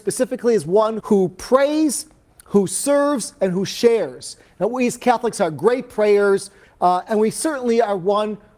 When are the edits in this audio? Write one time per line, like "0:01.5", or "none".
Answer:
0:01.0
0:06.6